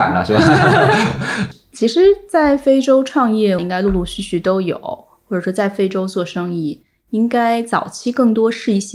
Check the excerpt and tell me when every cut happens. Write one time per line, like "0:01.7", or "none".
0:01.5
0:03.6